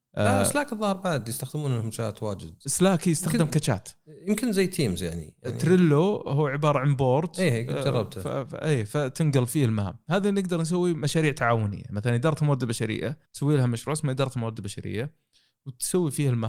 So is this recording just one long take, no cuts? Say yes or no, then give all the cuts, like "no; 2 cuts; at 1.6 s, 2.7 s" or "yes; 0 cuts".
no; 1 cut; at 13.3 s